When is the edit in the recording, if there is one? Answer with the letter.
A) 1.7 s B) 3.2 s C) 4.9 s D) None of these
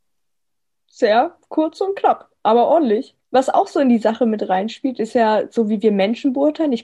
B